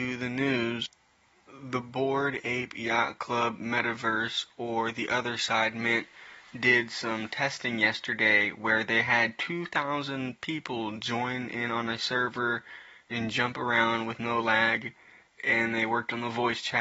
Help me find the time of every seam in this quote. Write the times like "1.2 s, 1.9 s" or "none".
none